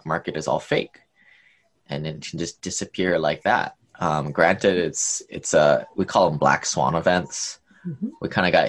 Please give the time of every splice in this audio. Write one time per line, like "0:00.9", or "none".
none